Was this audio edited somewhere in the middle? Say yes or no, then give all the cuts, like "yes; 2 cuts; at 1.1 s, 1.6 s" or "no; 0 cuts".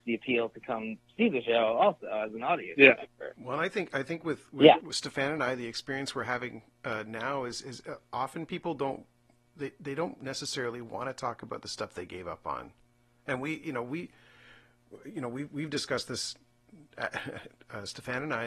yes; 1 cut; at 3.4 s